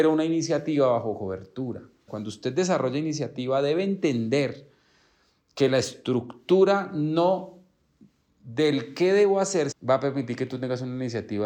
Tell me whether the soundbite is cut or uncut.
cut